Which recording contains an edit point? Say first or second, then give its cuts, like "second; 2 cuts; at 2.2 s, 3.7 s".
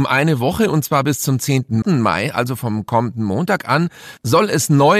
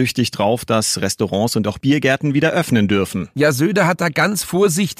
first; 1 cut; at 1.8 s